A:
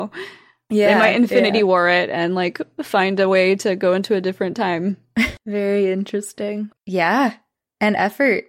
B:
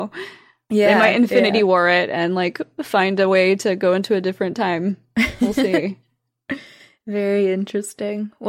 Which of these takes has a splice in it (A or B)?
A